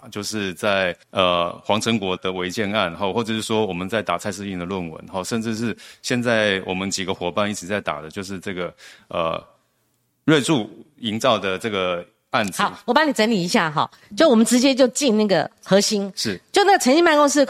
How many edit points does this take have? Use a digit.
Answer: 2